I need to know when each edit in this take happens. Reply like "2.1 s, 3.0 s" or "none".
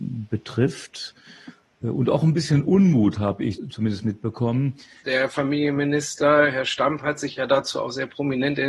5.0 s